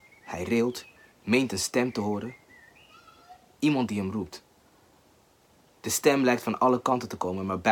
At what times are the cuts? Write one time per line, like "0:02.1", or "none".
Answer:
none